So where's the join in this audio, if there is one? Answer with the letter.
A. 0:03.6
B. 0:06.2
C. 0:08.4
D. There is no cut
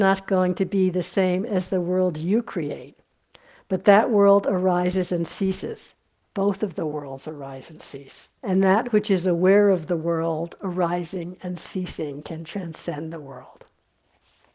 C